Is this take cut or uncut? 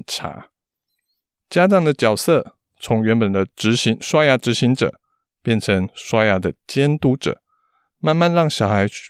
uncut